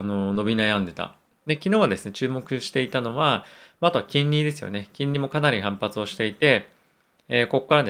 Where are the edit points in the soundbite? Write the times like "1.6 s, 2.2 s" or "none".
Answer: 1.3 s